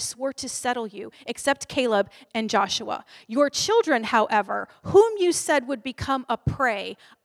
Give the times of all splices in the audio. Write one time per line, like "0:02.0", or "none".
0:02.3